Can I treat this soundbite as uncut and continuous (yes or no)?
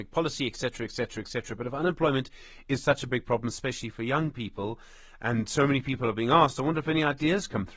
yes